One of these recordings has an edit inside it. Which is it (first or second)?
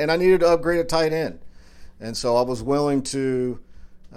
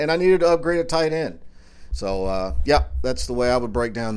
second